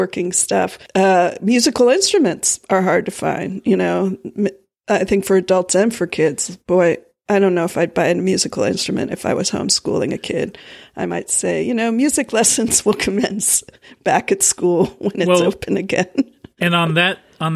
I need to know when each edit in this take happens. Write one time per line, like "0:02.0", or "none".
none